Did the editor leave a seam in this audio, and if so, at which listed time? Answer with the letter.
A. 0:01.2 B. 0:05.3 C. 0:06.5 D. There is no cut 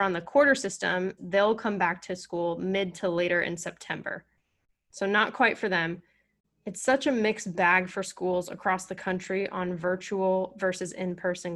A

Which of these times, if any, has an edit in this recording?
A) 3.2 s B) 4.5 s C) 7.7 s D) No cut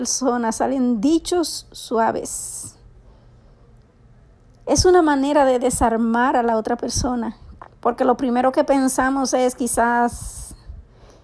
C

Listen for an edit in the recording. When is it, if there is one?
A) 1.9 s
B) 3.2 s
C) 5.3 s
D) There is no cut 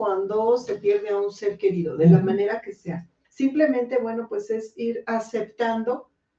B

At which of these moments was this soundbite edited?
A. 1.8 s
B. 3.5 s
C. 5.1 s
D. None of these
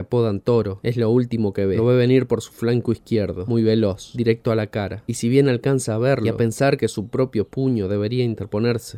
D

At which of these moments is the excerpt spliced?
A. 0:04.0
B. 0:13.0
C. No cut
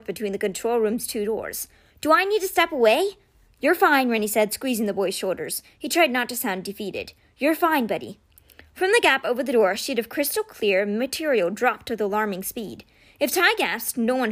C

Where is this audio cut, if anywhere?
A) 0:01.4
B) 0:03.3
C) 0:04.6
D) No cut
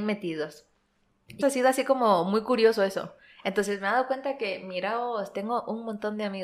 A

